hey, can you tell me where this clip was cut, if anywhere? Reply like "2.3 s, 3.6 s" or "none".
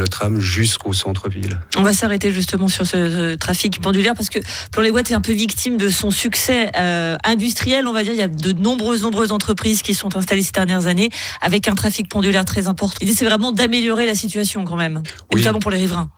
13.0 s